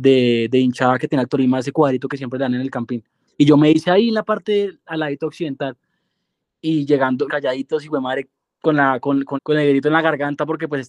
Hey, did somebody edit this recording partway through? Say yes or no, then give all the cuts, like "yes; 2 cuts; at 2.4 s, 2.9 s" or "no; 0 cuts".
yes; 3 cuts; at 3.3 s, 7.3 s, 9.3 s